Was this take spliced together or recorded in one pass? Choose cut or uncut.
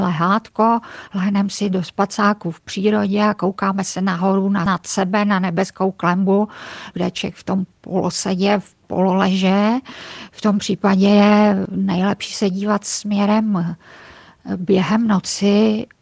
cut